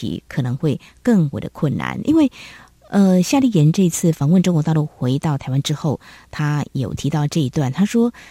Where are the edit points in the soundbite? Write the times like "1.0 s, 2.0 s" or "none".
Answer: none

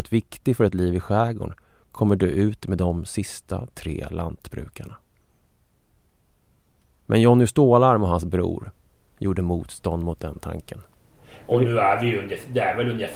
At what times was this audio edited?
none

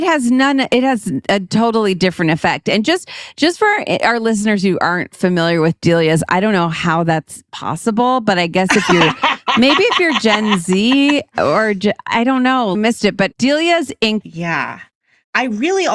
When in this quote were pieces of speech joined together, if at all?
12.7 s, 14.2 s

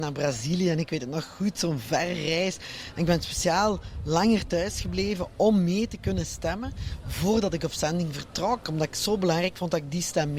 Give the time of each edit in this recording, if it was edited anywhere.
none

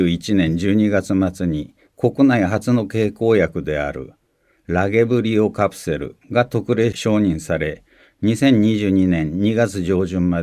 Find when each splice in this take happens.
none

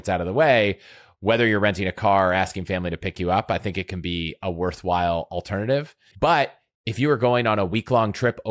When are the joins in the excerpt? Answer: 6.1 s

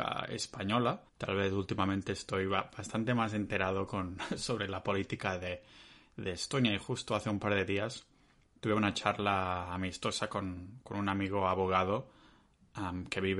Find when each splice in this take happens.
1.1 s

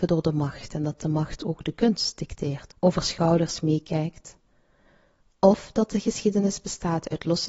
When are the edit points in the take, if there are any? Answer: 2.7 s

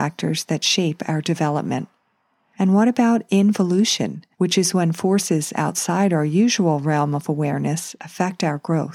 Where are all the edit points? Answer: 2.5 s, 4.3 s

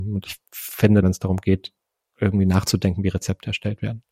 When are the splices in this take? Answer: 1.0 s

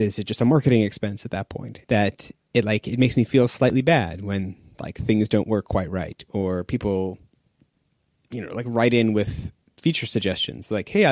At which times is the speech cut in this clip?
1.8 s

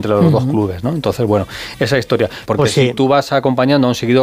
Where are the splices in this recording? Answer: 2.4 s

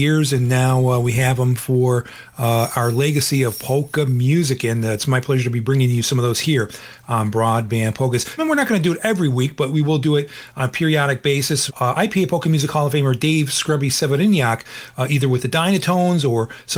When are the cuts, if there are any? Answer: 8.4 s, 11.7 s

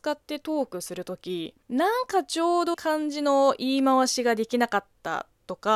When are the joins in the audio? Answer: 1.6 s, 2.7 s

